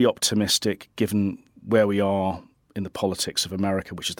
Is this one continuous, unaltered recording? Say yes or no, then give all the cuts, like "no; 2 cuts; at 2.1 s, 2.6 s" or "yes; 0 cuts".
yes; 0 cuts